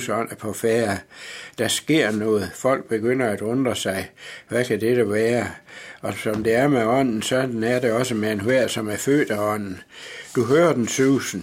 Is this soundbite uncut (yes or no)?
yes